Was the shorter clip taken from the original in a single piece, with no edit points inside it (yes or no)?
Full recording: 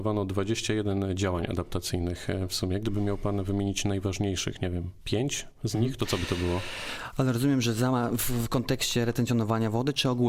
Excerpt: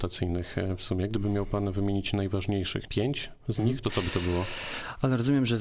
no